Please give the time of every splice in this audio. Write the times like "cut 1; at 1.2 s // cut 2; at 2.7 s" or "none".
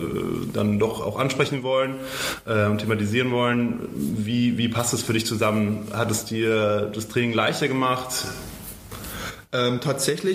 none